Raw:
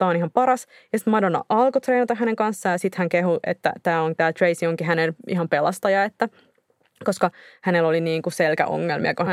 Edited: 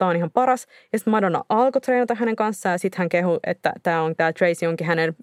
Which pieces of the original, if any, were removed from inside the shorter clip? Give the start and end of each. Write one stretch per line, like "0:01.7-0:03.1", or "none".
none